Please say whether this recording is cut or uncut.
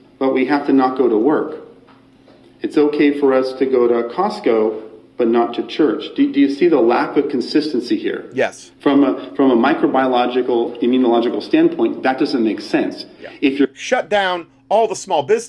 uncut